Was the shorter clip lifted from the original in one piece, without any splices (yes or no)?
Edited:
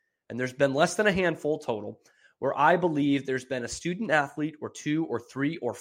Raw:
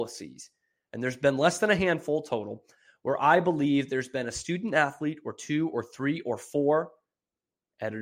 yes